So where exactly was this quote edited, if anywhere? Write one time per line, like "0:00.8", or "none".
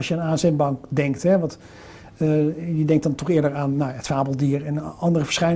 none